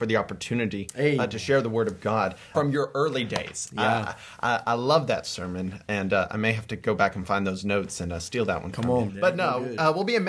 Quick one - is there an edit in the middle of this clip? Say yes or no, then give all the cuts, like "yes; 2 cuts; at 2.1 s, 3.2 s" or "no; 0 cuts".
yes; 2 cuts; at 2.5 s, 9.1 s